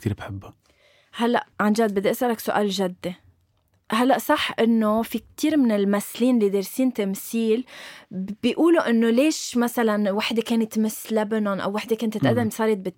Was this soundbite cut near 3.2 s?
no; 1 cut; at 1.5 s

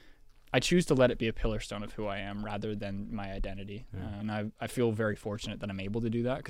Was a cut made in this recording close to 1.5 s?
no; 1 cut; at 4.2 s

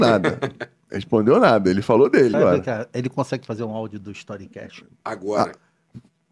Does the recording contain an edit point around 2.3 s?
yes; 1 cut; at 2.3 s

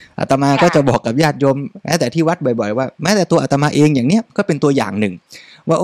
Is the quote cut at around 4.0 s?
no; 0 cuts

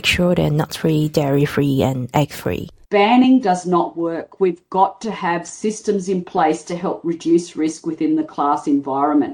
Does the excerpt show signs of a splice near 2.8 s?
yes; 1 cut; at 2.8 s

